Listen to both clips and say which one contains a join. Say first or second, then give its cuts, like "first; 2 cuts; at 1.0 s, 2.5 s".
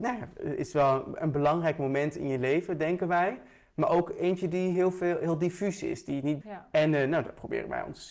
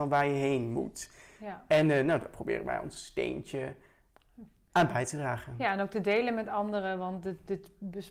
first; 1 cut; at 6.4 s